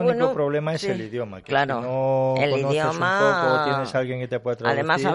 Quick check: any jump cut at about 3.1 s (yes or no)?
no